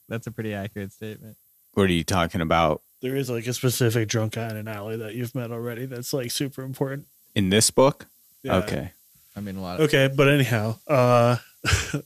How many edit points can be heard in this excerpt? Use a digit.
0